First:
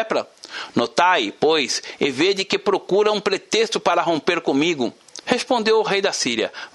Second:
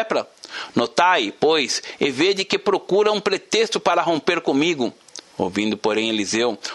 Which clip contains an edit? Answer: first; 1 cut; at 5.2 s

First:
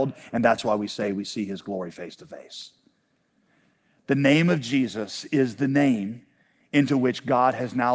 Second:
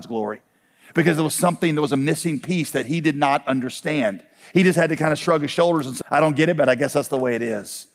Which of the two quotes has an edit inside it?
second; 1 cut; at 6.0 s

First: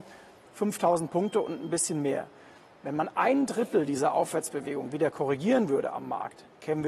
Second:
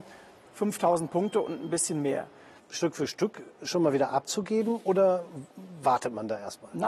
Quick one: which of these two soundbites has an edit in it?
second; 1 cut; at 2.6 s

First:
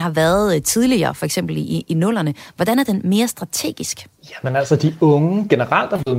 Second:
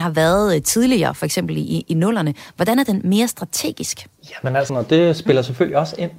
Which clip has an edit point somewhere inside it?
second; 1 cut; at 4.7 s

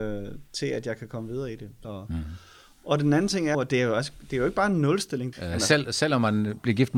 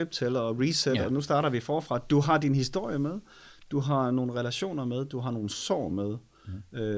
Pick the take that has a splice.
first; 3 cuts; at 1.8 s, 3.5 s, 5.3 s

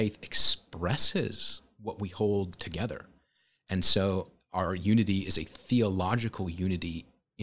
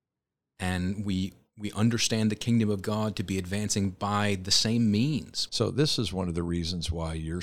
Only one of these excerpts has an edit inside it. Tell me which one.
second; 1 cut; at 5.5 s

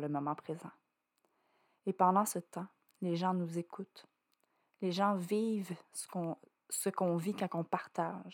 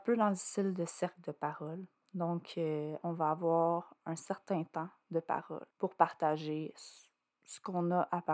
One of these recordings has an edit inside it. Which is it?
second; 2 cuts; at 3.0 s, 5.7 s

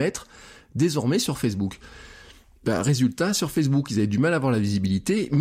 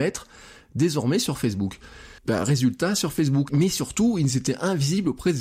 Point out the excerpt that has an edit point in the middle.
second; 2 cuts; at 2.2 s, 3.5 s

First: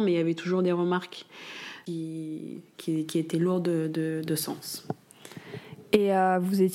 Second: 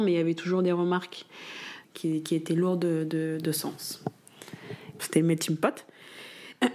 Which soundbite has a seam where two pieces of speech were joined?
second; 2 cuts; at 1.8 s, 5.0 s

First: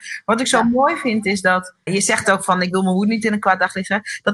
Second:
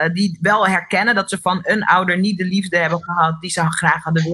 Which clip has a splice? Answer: first; 1 cut; at 1.9 s

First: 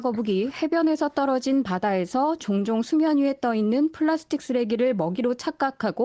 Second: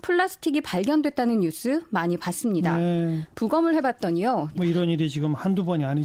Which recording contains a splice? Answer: second; 1 cut; at 4.6 s

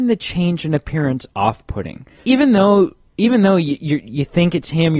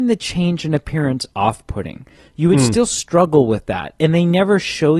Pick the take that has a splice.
first; 1 cut; at 2.2 s

